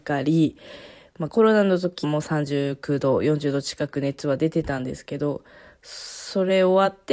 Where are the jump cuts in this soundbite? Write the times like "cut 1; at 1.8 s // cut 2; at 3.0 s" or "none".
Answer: cut 1; at 2.0 s